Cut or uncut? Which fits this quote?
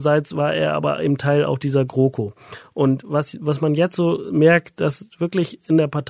uncut